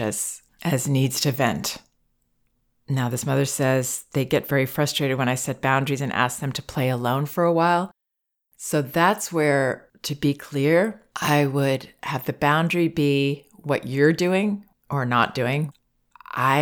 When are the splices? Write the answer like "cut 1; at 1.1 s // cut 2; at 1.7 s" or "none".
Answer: none